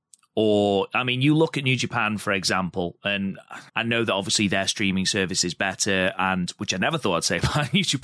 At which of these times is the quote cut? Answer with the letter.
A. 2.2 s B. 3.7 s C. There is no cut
B